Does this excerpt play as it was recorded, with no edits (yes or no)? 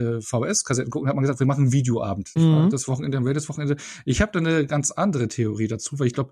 no